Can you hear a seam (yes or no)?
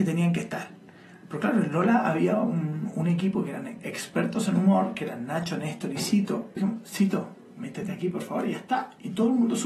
yes